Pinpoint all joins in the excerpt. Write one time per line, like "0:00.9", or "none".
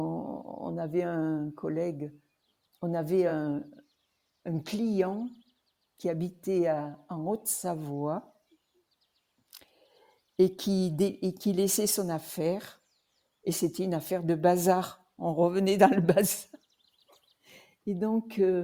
none